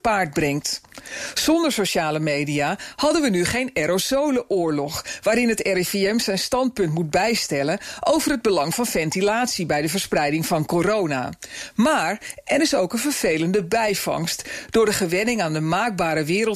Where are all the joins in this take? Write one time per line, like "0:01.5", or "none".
0:12.4